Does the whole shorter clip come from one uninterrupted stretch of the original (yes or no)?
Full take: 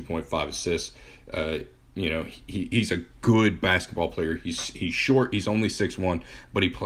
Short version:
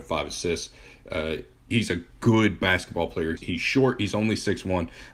no